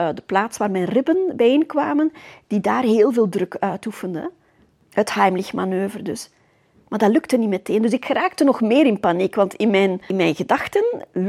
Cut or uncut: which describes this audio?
uncut